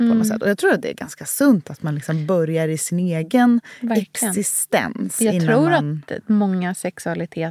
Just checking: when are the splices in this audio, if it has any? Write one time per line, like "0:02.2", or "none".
none